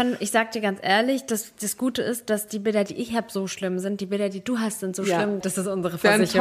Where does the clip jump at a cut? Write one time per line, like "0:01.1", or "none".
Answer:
0:05.4